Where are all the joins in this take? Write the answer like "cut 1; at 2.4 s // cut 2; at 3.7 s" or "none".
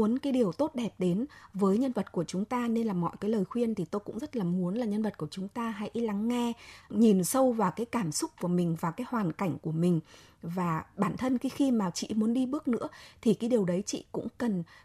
cut 1; at 6.8 s